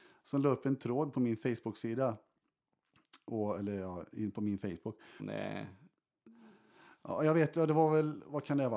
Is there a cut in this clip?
yes; 1 cut; at 5.2 s

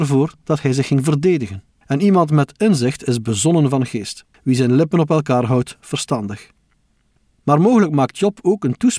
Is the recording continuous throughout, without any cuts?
no; 2 cuts; at 1.8 s, 4.3 s

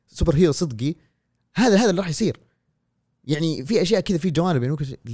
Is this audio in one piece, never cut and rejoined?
no; 1 cut; at 3.7 s

